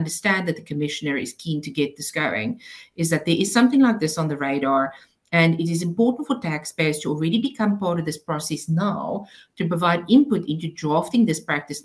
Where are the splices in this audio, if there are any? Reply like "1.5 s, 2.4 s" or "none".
none